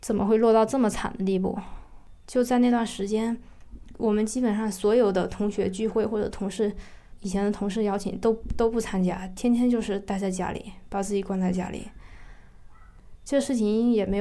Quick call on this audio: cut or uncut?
uncut